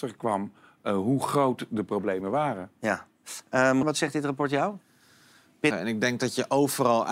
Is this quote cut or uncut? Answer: cut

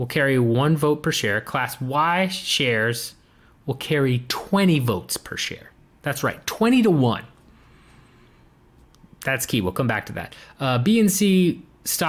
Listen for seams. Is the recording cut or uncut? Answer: uncut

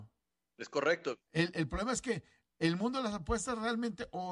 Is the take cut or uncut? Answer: cut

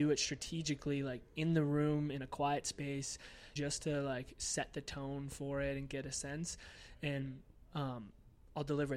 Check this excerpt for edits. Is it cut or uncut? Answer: cut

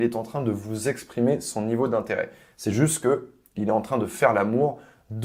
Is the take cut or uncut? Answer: uncut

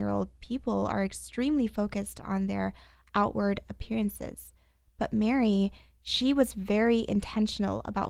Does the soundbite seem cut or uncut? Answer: uncut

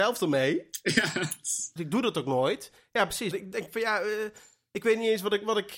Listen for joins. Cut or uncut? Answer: cut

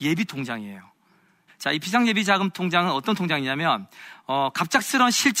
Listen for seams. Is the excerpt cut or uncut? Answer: cut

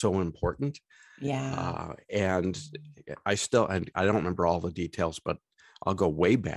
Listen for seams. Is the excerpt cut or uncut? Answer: uncut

